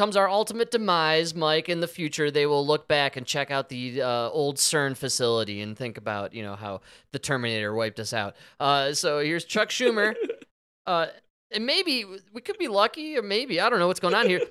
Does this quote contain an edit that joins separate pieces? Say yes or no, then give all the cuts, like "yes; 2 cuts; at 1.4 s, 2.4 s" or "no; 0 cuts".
no; 0 cuts